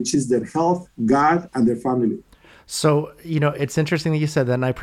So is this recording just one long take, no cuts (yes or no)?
yes